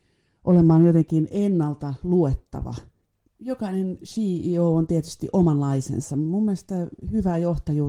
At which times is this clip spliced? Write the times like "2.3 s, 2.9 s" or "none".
3.3 s